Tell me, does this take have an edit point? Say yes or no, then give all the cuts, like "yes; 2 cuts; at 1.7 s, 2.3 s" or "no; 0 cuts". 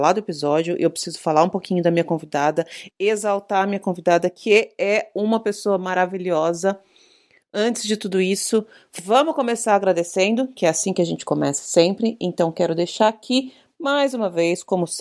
no; 0 cuts